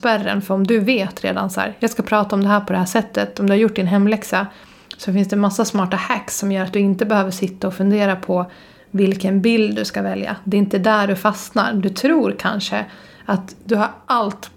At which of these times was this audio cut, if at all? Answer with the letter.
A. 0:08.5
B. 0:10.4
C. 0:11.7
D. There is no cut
D